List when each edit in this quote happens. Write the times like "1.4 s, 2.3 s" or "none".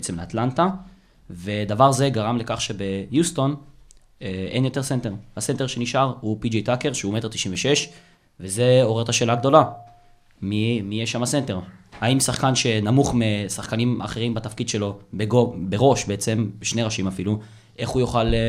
none